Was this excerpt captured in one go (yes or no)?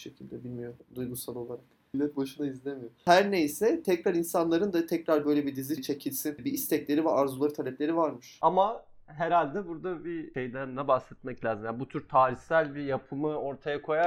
no